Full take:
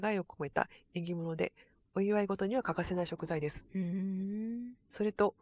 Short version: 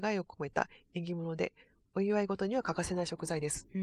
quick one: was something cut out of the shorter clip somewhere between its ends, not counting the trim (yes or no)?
no